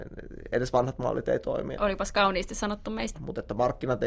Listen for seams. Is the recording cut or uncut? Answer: cut